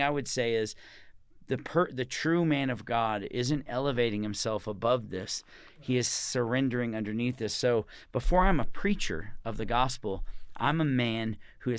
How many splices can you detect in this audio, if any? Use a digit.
0